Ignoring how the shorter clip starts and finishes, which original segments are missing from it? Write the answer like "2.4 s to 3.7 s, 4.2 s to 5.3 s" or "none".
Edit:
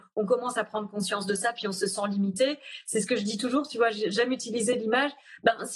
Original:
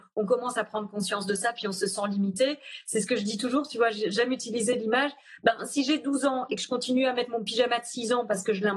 none